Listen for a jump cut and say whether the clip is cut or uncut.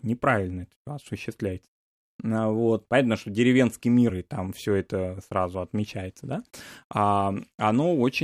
cut